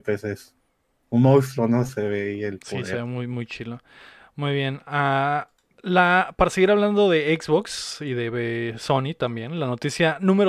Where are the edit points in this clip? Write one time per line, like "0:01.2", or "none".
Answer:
none